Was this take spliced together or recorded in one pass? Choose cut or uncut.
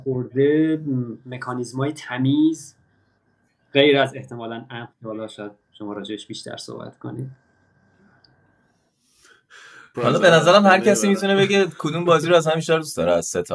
cut